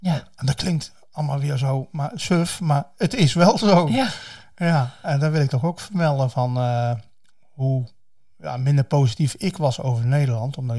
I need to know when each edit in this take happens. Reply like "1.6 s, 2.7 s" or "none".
none